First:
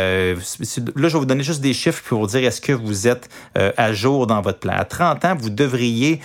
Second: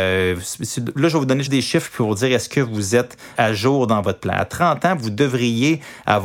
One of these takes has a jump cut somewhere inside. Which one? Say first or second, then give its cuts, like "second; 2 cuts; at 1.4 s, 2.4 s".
second; 2 cuts; at 1.5 s, 3.3 s